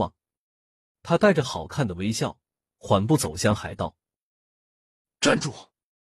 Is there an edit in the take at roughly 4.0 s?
no; 1 cut; at 0.9 s

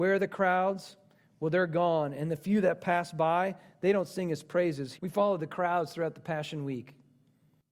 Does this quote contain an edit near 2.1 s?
no; 1 cut; at 5.0 s

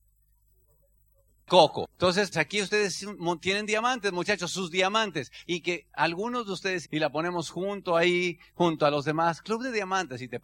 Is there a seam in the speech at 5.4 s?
yes; 3 cuts; at 2.3 s, 5.4 s, 6.8 s

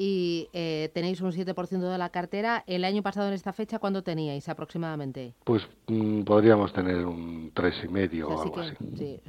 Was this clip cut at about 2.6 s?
no; 1 cut; at 5.4 s

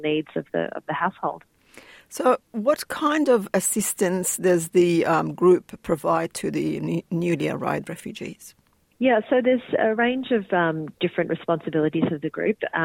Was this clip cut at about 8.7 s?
no; 0 cuts

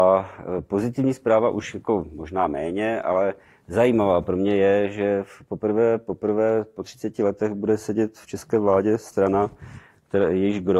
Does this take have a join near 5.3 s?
no; 0 cuts

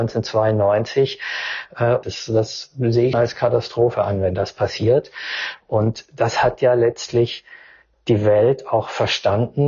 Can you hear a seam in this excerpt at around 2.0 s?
yes; 2 cuts; at 2.0 s, 3.1 s

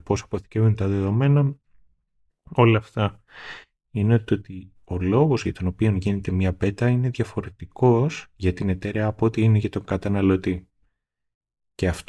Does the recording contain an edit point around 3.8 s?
yes; 1 cut; at 3.8 s

